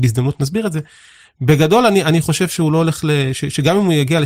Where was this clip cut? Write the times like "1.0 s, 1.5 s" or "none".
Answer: none